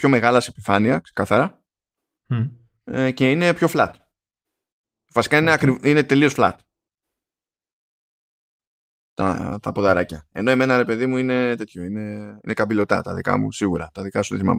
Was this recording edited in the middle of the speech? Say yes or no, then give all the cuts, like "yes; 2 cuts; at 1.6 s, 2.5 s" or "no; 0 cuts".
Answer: no; 0 cuts